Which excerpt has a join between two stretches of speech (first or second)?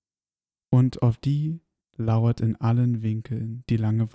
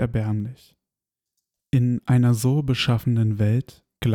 first